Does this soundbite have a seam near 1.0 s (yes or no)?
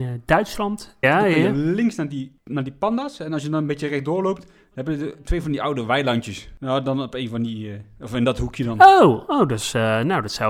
yes